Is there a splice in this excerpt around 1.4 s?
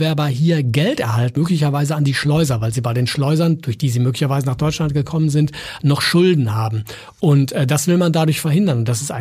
yes; 1 cut; at 1.4 s

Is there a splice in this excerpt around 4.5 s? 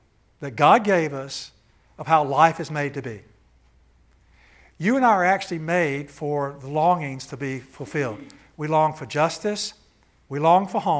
no; 0 cuts

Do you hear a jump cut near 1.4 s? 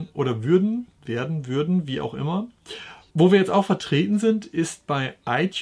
no; 1 cut; at 3.1 s

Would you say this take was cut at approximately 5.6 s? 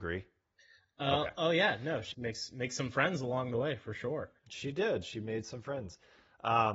no; 2 cuts; at 2.1 s, 4.4 s

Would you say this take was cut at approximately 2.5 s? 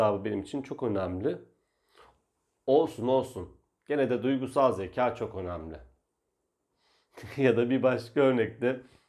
no; 0 cuts

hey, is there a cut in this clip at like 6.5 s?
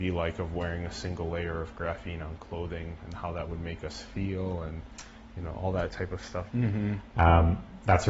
yes; 1 cut; at 6.5 s

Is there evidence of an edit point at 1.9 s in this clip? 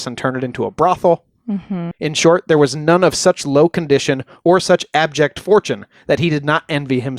yes; 1 cut; at 1.9 s

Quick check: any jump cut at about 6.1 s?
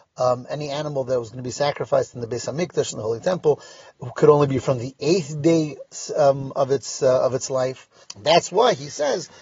no; 1 cut; at 8.0 s

